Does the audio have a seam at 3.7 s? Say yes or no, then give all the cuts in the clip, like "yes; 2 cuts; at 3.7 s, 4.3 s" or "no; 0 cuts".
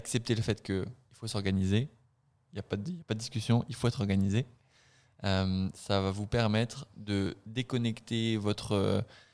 no; 0 cuts